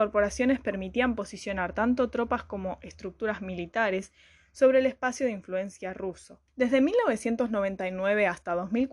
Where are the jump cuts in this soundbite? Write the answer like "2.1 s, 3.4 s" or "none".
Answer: 6.5 s